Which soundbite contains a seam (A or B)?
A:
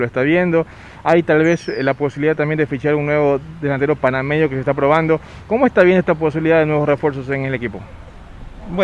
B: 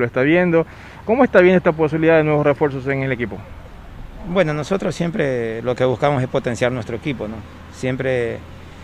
B